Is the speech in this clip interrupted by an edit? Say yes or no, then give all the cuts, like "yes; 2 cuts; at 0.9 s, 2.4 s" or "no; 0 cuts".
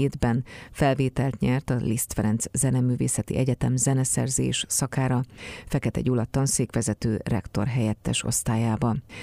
no; 0 cuts